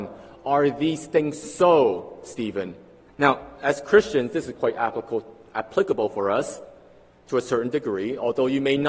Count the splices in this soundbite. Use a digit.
1